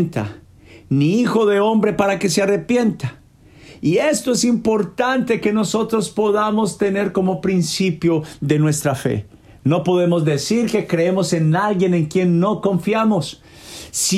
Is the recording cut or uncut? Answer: uncut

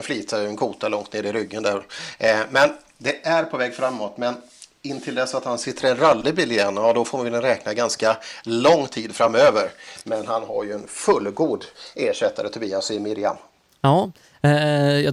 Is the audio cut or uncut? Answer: uncut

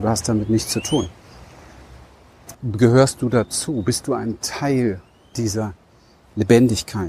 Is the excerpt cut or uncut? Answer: cut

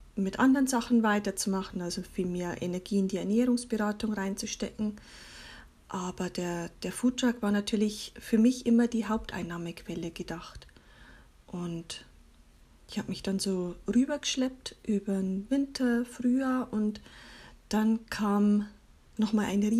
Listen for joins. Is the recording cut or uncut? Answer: uncut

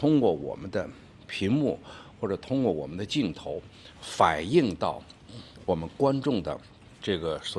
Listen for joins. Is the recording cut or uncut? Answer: uncut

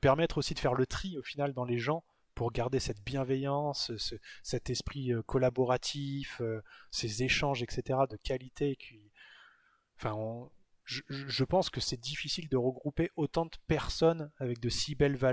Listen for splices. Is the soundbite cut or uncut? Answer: uncut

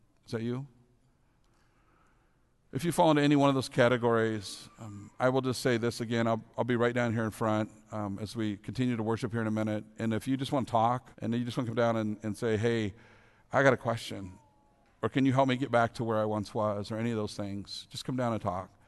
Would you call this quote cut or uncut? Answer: cut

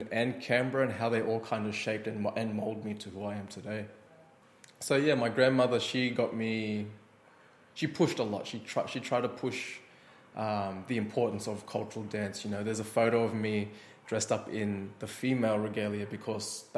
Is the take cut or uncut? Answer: uncut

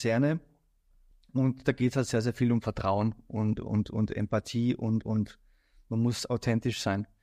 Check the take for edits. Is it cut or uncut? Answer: uncut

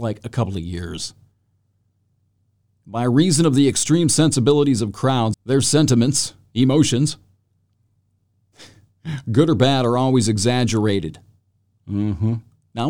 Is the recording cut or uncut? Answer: cut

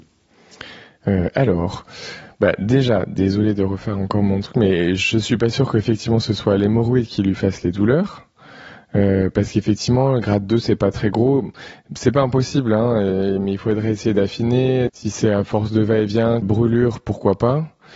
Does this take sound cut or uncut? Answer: cut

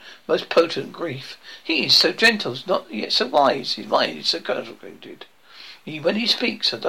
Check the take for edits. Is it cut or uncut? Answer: uncut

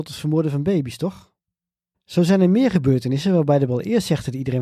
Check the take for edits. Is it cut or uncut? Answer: cut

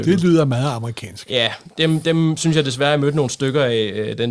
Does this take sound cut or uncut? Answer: uncut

